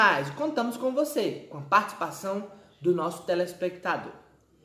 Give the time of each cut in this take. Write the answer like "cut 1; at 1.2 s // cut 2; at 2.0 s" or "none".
none